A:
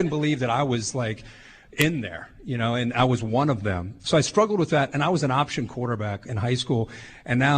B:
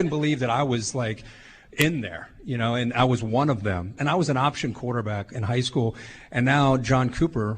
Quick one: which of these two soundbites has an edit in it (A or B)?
B